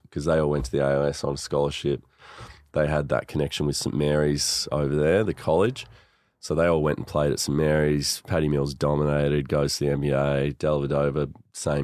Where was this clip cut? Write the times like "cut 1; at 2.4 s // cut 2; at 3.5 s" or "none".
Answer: none